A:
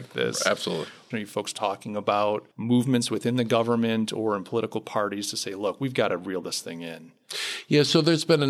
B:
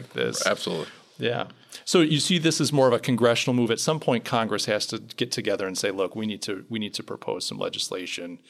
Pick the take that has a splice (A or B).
A